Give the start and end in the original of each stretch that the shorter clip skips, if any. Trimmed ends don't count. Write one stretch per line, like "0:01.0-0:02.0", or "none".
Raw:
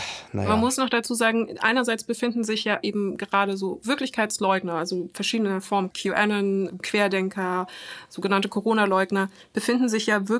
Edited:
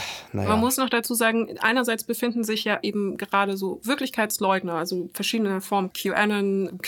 none